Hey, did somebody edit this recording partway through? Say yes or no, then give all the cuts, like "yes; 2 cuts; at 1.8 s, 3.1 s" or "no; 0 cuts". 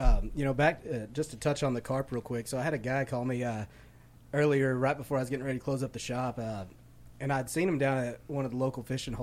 no; 0 cuts